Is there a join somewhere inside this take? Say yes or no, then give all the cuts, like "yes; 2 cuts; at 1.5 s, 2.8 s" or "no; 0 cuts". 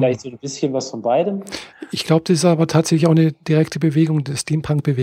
no; 0 cuts